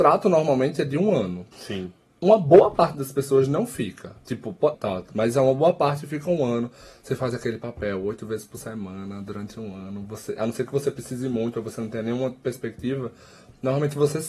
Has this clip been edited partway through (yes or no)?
yes